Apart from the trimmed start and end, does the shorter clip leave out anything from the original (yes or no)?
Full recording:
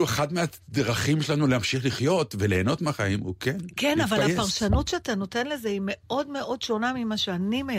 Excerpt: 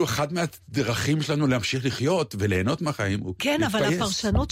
yes